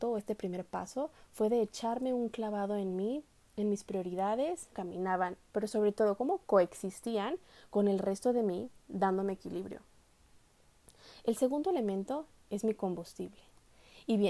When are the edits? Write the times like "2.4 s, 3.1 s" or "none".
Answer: 4.7 s